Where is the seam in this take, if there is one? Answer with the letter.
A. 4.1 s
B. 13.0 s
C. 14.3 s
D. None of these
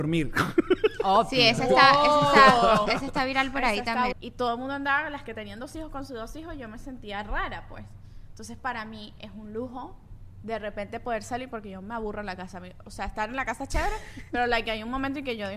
A